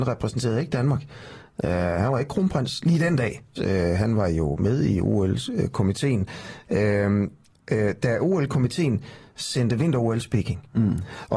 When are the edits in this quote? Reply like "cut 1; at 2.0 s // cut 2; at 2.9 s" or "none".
cut 1; at 3.6 s